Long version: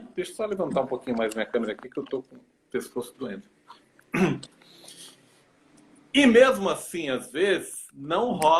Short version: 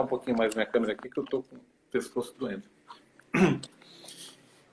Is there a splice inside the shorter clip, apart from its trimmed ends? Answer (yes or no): no